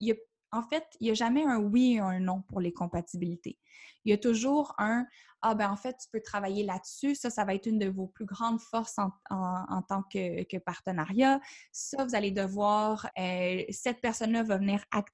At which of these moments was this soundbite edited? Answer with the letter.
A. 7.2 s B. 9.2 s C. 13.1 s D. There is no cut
C